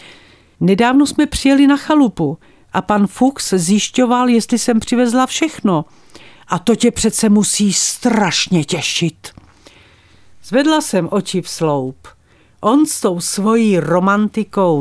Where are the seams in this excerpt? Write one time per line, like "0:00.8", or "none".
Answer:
0:06.4